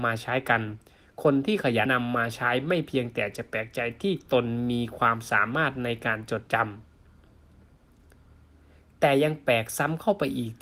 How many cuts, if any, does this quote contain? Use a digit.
1